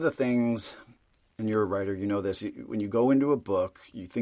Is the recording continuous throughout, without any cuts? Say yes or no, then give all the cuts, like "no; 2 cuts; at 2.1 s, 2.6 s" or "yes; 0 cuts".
yes; 0 cuts